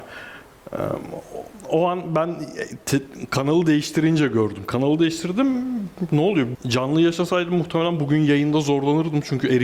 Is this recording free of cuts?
no; 1 cut; at 6.5 s

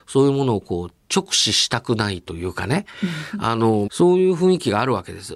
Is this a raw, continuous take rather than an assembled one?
no; 2 cuts; at 1.0 s, 3.9 s

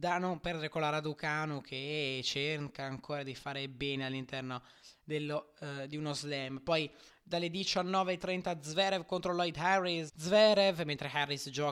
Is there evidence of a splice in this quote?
yes; 1 cut; at 10.1 s

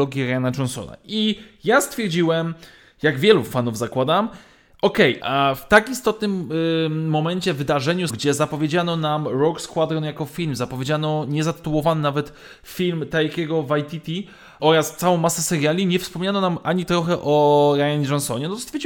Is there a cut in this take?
yes; 3 cuts; at 5.2 s, 8.1 s, 14.6 s

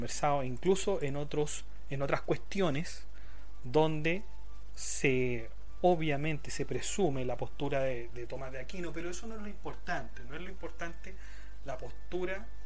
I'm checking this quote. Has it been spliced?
no; 0 cuts

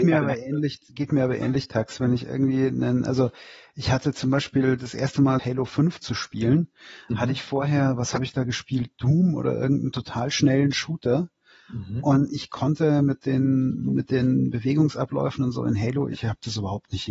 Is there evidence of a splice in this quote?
yes; 1 cut; at 5.4 s

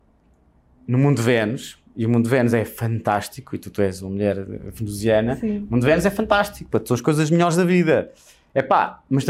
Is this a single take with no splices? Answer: yes; 0 cuts

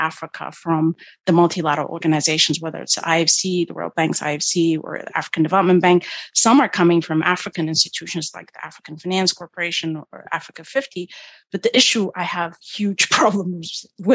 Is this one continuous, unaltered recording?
no; 1 cut; at 12.6 s

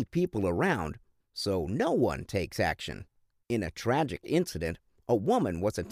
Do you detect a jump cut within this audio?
yes; 2 cuts; at 1.2 s, 3.4 s

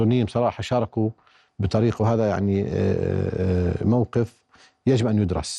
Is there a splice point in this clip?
no; 0 cuts

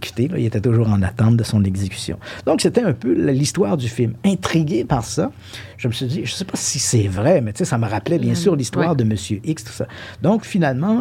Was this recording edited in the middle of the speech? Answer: no; 0 cuts

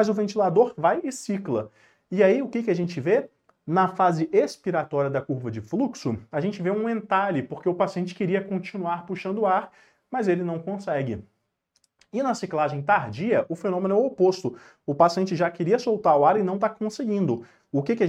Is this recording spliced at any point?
no; 0 cuts

